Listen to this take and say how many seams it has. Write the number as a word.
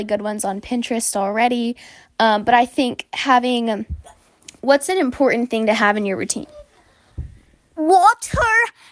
zero